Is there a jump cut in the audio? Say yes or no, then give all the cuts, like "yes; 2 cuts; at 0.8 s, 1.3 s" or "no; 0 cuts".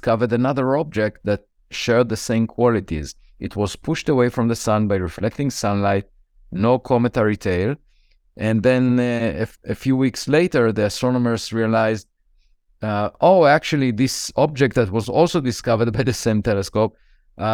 no; 0 cuts